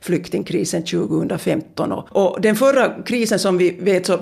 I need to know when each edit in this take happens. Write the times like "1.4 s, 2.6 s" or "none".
none